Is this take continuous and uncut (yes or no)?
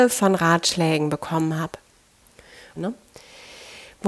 no